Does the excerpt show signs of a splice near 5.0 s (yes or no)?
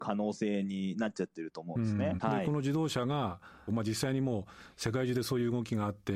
no